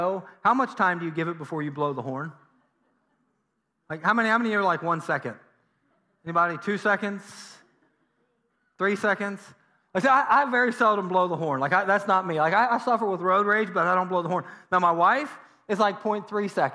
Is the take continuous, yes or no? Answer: yes